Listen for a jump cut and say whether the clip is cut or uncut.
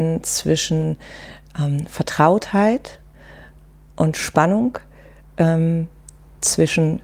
uncut